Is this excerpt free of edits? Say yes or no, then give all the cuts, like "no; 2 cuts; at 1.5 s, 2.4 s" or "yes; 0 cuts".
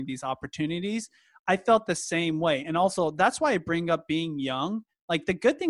yes; 0 cuts